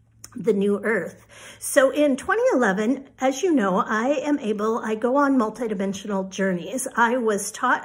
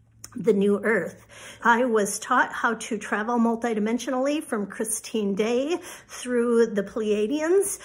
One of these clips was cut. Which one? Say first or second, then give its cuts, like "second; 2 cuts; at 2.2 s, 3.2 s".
second; 1 cut; at 1.6 s